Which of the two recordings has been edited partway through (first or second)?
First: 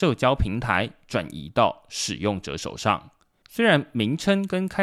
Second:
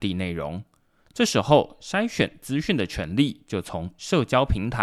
first